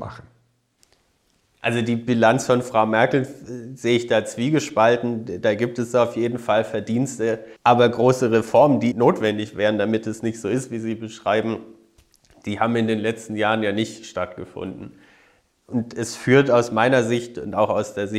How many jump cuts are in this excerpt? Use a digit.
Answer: 2